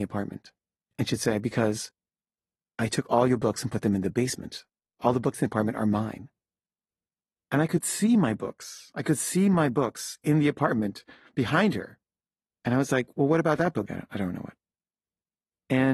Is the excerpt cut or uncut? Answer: cut